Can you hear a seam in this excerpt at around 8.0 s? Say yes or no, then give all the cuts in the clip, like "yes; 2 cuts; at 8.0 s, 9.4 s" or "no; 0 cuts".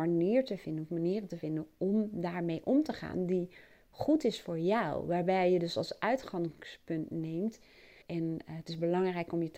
yes; 1 cut; at 8.0 s